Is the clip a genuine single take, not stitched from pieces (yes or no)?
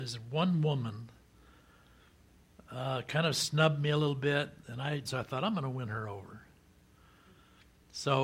no